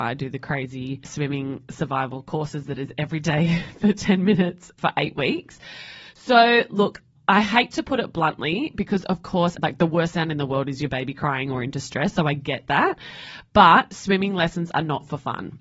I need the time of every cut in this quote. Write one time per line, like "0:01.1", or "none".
0:09.5